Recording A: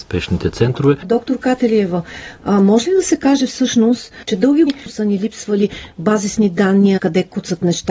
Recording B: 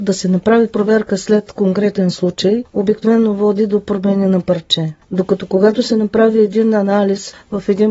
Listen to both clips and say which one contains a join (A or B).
A